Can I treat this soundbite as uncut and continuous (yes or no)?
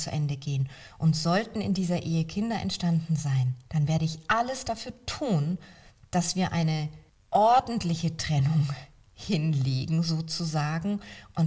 no